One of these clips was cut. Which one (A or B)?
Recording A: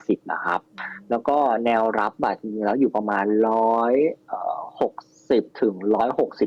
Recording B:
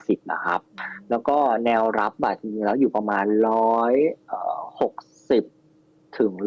A